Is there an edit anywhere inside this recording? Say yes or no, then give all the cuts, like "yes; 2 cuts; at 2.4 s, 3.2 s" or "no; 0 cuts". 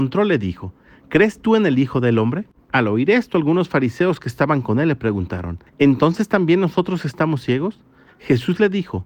yes; 3 cuts; at 2.7 s, 5.7 s, 8.1 s